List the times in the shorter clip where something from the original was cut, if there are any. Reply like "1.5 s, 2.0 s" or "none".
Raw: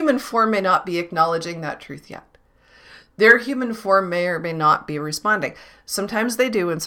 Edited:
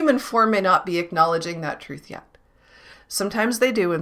2.9 s